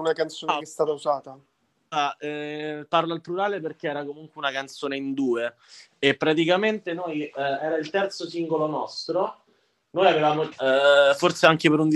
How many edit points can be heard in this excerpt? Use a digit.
1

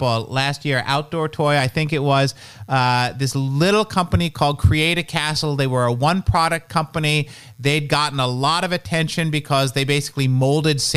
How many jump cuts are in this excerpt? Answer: 0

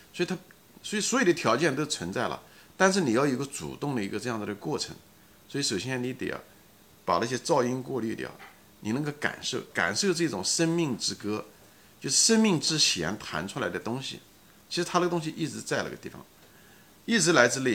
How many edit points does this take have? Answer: 0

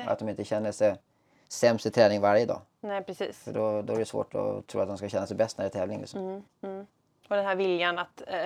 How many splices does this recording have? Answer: 0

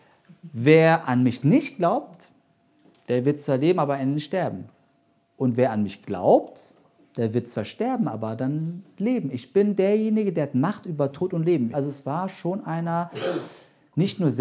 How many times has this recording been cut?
1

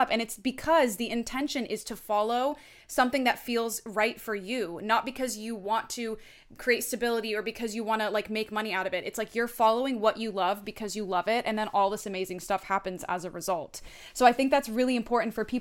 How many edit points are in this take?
0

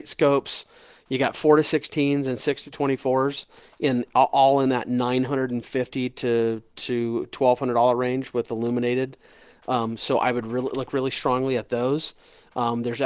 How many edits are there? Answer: 0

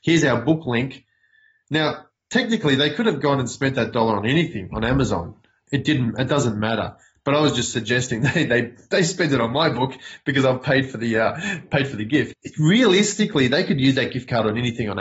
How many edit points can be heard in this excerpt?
1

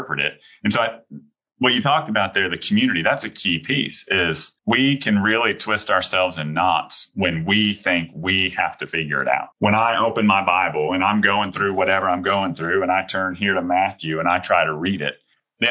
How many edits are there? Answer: 2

